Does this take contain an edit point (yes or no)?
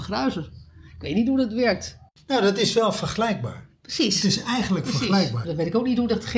yes